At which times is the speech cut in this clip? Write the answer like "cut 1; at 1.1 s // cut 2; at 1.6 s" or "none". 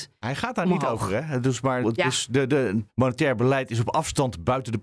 cut 1; at 1.8 s // cut 2; at 2.9 s